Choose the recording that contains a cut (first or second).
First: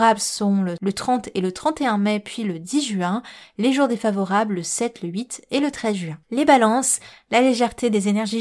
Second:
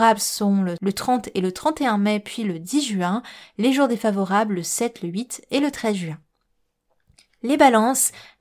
first